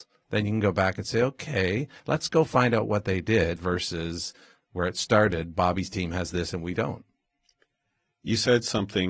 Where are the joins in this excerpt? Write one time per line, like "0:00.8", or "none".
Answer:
0:03.6